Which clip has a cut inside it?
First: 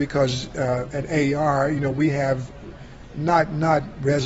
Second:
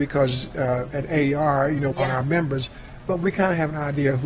second; 1 cut; at 1.9 s

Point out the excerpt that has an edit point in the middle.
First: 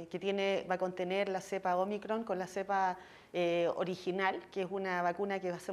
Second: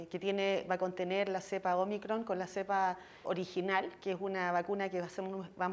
second; 1 cut; at 3.2 s

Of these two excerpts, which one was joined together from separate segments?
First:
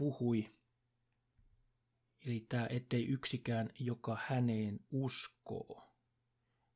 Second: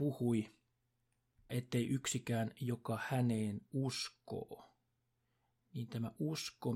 second; 1 cut; at 1.5 s

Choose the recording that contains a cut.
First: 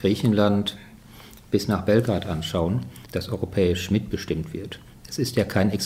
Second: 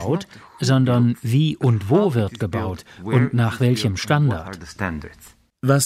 first; 1 cut; at 3.1 s

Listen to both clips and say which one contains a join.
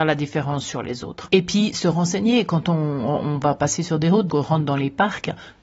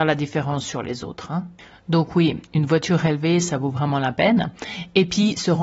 first; 2 cuts; at 1.3 s, 4.3 s

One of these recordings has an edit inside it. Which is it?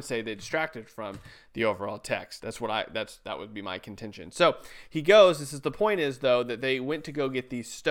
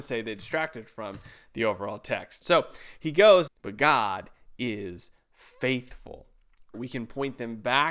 second; 3 cuts; at 2.4 s, 3.5 s, 6.7 s

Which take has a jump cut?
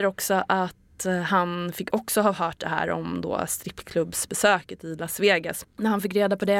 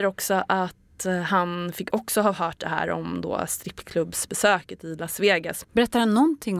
second; 1 cut; at 5.7 s

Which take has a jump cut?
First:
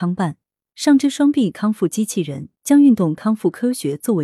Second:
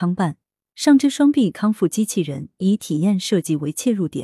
first; 1 cut; at 2.6 s

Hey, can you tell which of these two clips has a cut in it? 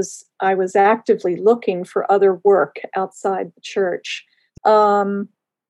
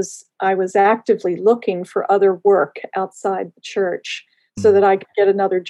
first; 1 cut; at 4.6 s

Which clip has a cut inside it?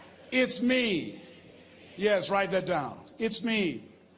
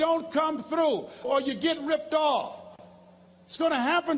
second; 1 cut; at 1.2 s

